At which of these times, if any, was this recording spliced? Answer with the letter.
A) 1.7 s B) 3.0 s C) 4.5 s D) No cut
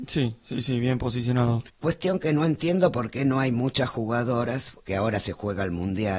A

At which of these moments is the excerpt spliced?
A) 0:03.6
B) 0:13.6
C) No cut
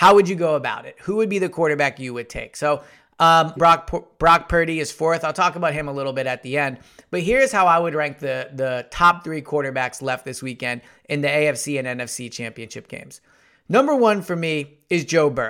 A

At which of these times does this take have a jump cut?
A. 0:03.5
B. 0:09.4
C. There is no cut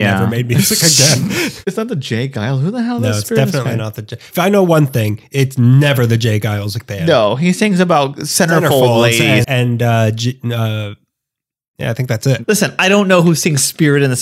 B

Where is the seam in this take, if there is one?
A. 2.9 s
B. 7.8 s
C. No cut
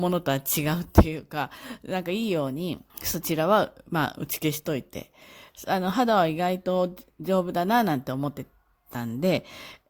A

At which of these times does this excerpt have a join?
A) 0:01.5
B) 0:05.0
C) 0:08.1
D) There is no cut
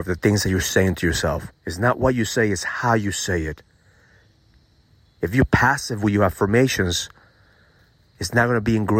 A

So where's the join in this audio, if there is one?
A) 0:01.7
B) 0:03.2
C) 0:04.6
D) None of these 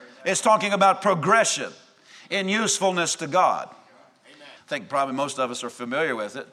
C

